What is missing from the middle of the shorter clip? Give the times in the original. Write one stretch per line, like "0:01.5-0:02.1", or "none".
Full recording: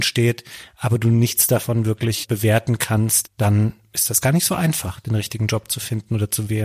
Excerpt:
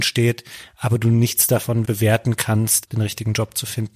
0:01.8-0:02.3
0:03.3-0:05.0